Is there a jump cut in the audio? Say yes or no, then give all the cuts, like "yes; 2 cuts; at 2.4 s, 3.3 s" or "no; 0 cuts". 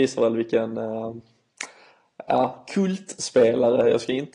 no; 0 cuts